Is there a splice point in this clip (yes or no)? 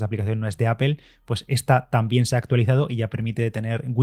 no